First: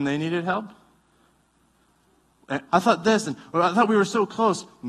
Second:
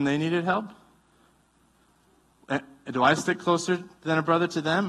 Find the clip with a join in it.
first; 1 cut; at 2.7 s

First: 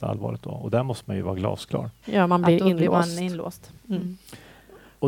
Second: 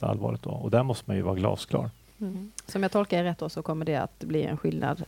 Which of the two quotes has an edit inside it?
first; 1 cut; at 2.0 s

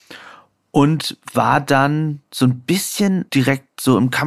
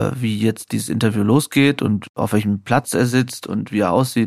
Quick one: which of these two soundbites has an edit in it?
first; 1 cut; at 3.3 s

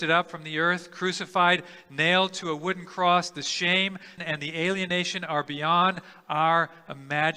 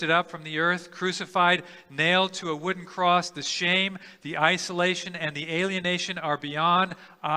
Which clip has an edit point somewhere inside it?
first; 1 cut; at 4.2 s

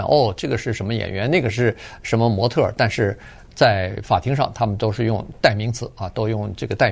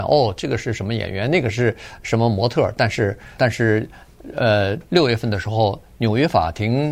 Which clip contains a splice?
second; 2 cuts; at 3.4 s, 4.9 s

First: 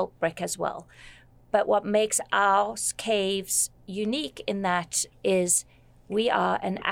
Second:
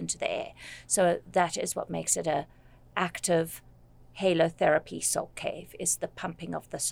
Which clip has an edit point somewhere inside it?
first; 1 cut; at 5.1 s

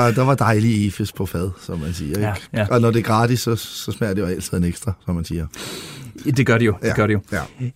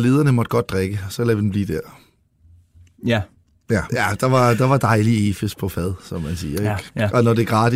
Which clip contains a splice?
second; 1 cut; at 3.9 s

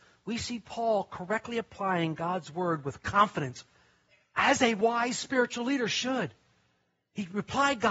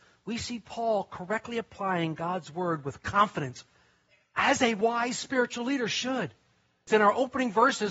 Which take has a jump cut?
second; 1 cut; at 6.9 s

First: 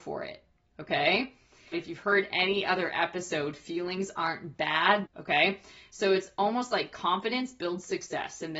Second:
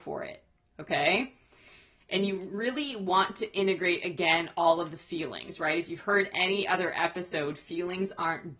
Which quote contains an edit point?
first; 2 cuts; at 1.7 s, 5.1 s

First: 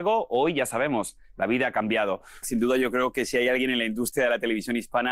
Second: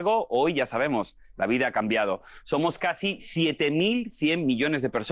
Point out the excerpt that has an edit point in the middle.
first; 1 cut; at 2.4 s

